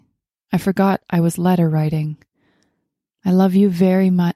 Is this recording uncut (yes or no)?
yes